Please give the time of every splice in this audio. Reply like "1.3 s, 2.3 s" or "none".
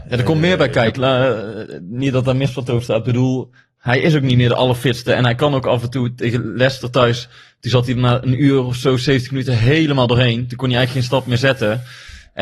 0.9 s